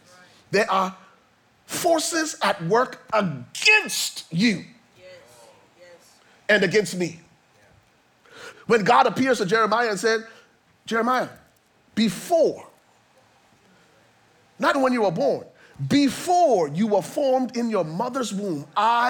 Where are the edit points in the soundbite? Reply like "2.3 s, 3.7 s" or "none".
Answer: 8.5 s, 14.7 s